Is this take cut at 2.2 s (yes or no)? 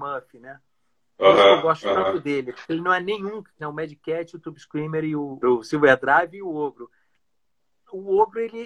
no